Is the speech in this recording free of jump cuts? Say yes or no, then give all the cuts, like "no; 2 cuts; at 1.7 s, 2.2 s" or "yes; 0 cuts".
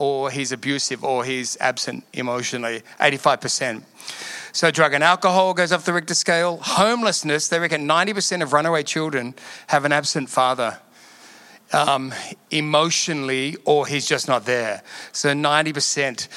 yes; 0 cuts